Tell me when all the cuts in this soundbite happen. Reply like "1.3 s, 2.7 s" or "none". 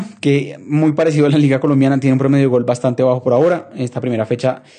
none